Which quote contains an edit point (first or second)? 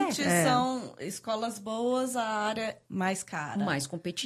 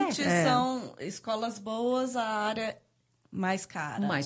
first